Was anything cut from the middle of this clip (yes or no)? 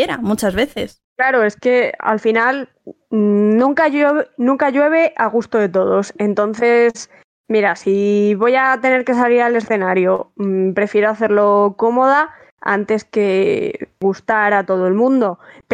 no